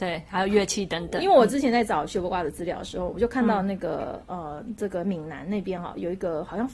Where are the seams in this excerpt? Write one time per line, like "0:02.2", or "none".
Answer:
none